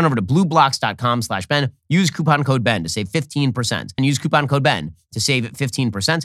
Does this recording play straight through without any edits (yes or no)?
no